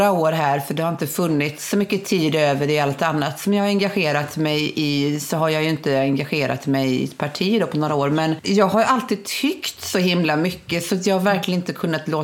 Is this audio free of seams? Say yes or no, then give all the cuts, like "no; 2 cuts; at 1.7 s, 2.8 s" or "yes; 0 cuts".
yes; 0 cuts